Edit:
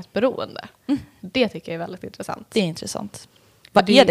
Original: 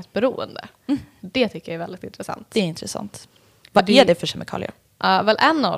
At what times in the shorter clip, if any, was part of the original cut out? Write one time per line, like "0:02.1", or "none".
none